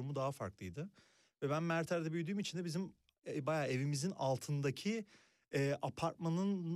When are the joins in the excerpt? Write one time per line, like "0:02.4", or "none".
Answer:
none